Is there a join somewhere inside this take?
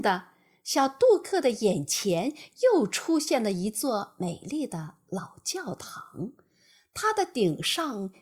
no; 0 cuts

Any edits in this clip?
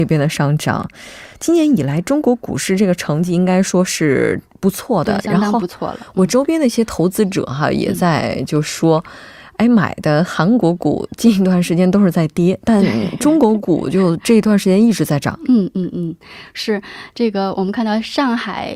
no; 0 cuts

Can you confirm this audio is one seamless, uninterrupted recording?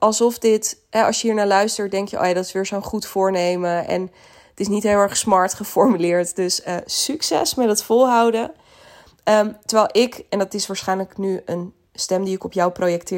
yes; 0 cuts

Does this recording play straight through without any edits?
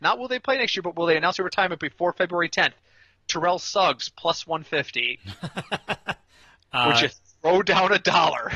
no; 1 cut; at 5.2 s

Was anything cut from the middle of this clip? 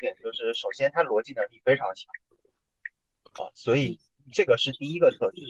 yes; 1 cut; at 3.4 s

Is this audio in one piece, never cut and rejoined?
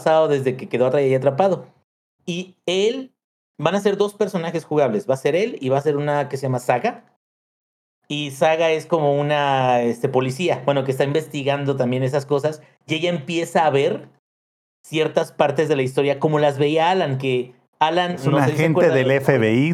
yes; 0 cuts

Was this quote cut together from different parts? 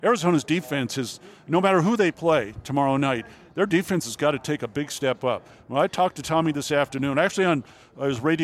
no; 0 cuts

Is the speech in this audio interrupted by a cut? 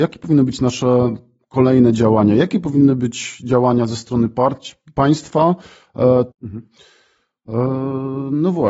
yes; 1 cut; at 6.3 s

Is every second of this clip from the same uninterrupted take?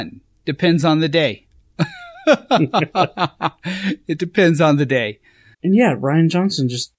no; 1 cut; at 5.5 s

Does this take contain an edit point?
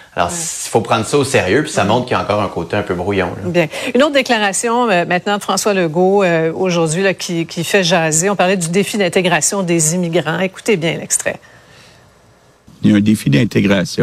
no; 0 cuts

